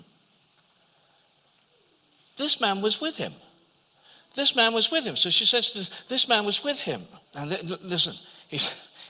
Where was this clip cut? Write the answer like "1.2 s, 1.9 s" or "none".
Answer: 7.2 s